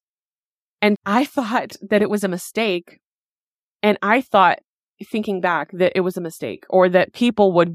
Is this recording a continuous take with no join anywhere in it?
no; 2 cuts; at 1.0 s, 3.8 s

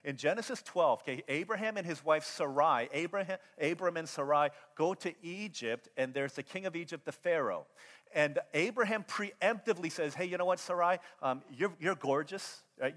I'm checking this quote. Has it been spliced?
no; 0 cuts

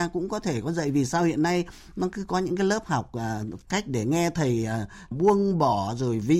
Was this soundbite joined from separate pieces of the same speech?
yes; 2 cuts; at 3.7 s, 5.1 s

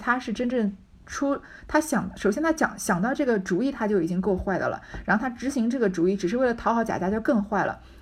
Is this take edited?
no; 0 cuts

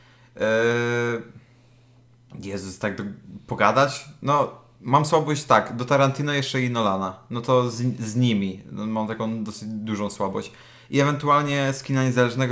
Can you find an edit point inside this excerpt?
no; 0 cuts

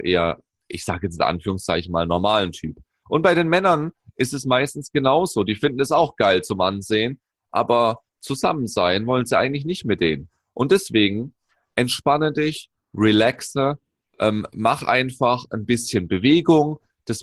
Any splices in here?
no; 0 cuts

